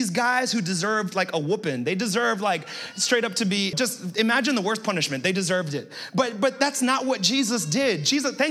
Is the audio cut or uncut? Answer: cut